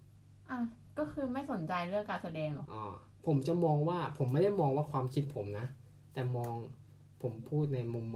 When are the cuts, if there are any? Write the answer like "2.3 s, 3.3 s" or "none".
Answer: 2.7 s

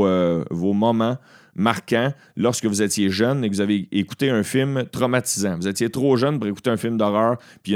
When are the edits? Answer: none

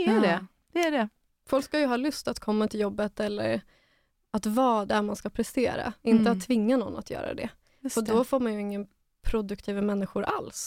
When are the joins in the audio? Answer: 4.9 s

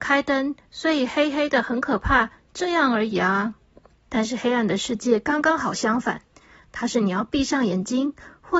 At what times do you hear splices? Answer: 4.0 s

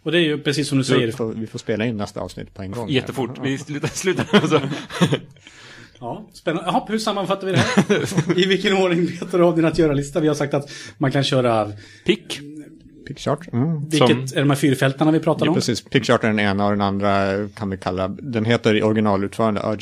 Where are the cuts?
1.1 s

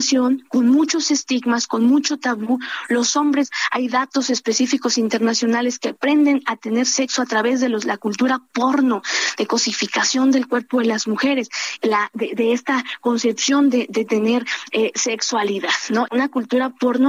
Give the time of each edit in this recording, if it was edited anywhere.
11.8 s, 16.1 s

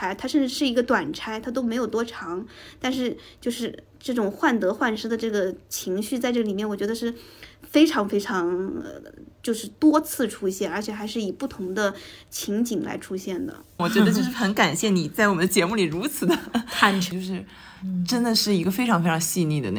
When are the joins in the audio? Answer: 13.8 s, 17.1 s

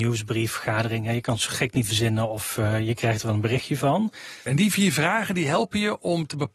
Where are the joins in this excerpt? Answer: 4.5 s

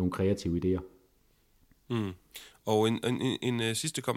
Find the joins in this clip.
none

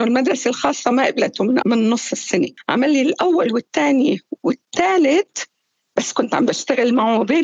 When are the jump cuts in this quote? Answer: none

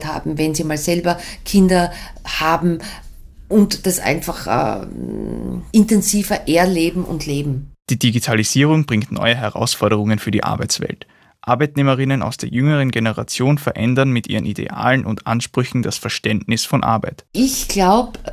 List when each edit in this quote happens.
5.7 s

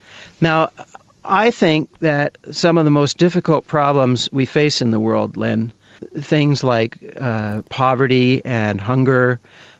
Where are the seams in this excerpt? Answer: 6.0 s

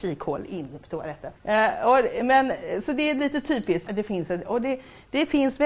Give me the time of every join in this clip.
1.4 s, 3.9 s

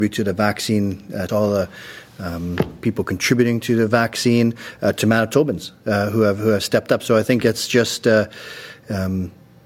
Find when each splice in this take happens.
1.3 s

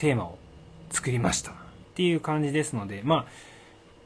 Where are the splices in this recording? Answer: 1.8 s

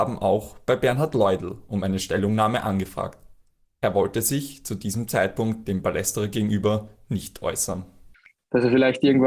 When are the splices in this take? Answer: none

